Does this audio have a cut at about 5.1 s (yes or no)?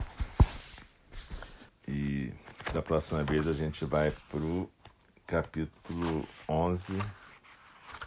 no